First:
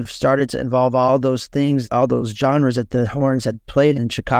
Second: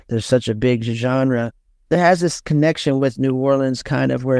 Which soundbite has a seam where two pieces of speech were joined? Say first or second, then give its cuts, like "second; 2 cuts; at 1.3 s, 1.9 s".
second; 1 cut; at 1.9 s